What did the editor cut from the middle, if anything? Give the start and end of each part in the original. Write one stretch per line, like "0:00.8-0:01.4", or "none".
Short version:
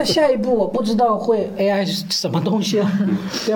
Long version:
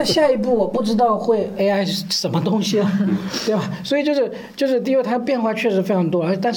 none